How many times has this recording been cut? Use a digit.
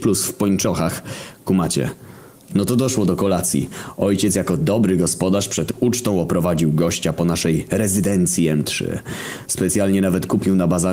0